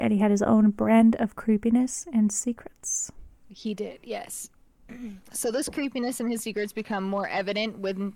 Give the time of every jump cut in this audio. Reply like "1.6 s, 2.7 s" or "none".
5.2 s